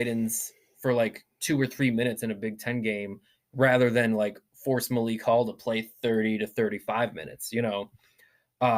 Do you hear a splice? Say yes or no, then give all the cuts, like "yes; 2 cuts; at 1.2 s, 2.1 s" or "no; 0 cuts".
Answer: no; 0 cuts